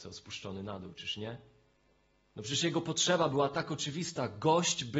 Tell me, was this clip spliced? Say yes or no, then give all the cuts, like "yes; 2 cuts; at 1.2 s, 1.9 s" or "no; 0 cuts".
no; 0 cuts